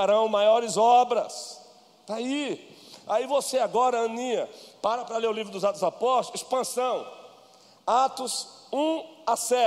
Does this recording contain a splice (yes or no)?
no